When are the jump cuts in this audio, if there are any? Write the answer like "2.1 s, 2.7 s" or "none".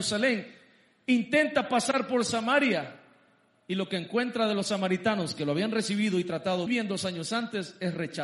6.7 s